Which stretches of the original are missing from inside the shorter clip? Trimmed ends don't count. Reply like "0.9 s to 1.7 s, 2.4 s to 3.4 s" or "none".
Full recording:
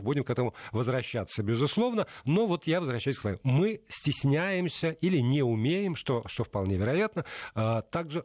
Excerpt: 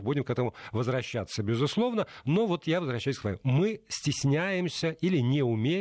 none